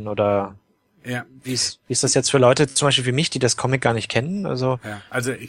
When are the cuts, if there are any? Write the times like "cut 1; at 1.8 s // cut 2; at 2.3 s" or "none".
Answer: none